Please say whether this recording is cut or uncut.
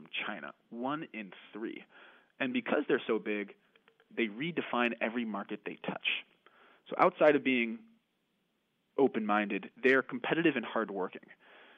cut